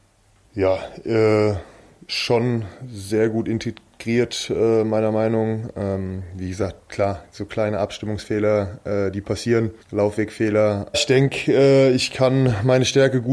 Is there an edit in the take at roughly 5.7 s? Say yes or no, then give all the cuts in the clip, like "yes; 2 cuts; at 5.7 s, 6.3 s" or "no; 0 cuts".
no; 2 cuts; at 9.8 s, 10.9 s